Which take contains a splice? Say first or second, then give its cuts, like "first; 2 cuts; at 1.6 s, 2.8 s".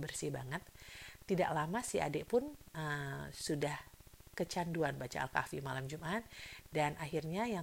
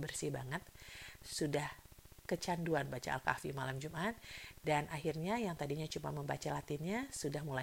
second; 1 cut; at 1.2 s